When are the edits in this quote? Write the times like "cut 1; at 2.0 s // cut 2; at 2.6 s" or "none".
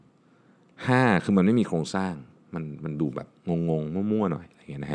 none